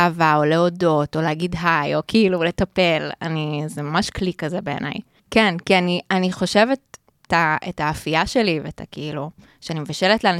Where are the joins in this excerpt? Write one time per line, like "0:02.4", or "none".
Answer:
0:05.2
0:07.3